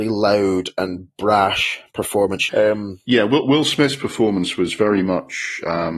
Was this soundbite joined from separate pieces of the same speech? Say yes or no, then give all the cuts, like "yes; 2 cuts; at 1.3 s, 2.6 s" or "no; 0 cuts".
yes; 1 cut; at 2.5 s